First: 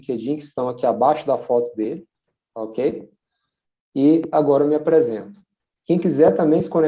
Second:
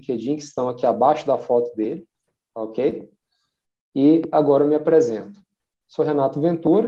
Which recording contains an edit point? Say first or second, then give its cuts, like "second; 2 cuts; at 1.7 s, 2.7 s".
first; 1 cut; at 5.8 s